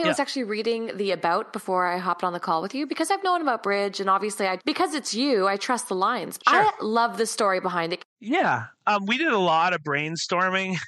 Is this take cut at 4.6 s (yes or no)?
yes